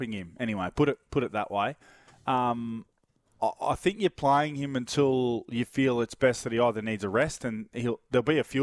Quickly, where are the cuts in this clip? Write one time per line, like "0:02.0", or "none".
none